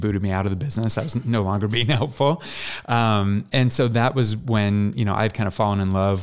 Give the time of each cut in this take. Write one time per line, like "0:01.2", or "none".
none